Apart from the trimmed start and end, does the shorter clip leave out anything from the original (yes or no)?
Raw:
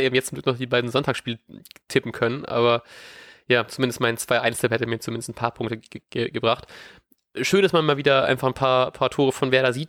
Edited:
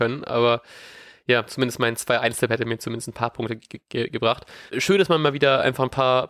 yes